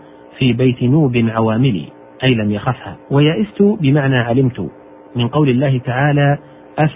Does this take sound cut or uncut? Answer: cut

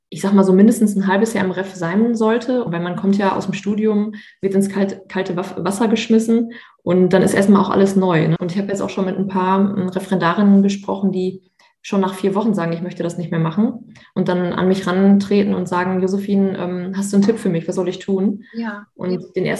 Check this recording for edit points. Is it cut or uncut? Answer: cut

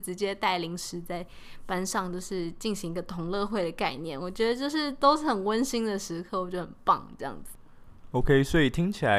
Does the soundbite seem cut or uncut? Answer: uncut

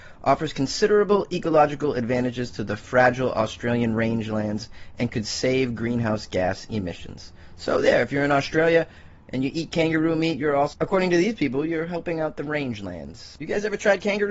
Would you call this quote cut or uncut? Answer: uncut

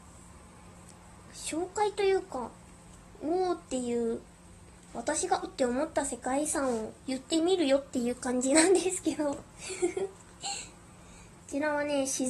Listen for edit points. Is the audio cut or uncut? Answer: cut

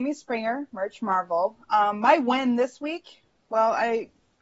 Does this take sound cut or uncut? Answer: uncut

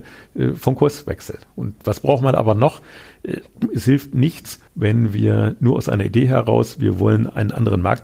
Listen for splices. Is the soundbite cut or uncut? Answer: cut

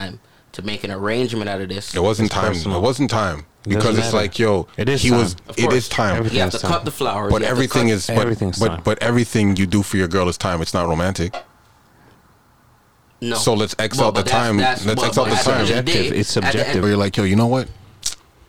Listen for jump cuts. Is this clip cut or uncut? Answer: cut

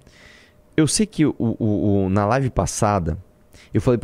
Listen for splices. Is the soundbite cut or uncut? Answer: uncut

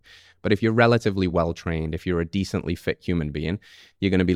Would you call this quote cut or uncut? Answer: uncut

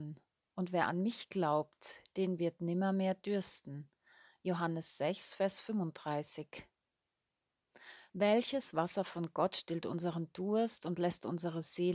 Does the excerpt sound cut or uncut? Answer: cut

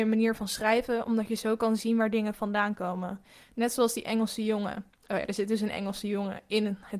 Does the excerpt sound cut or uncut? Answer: uncut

